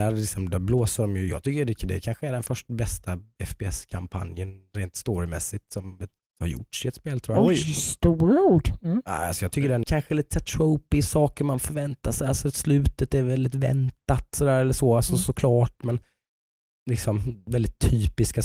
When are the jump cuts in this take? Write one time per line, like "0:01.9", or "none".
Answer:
0:09.8